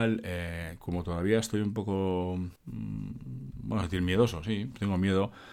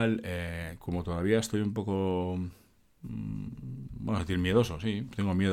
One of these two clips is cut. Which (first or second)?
first